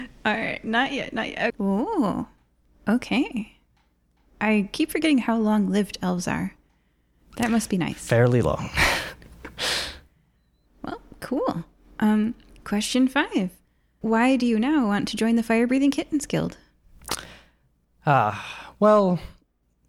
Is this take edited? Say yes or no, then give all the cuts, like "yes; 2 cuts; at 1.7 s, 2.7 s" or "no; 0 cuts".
yes; 2 cuts; at 1.5 s, 14.0 s